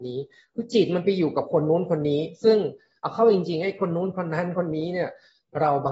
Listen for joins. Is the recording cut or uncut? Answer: uncut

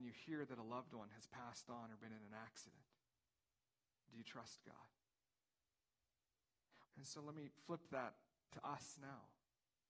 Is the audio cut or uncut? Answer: cut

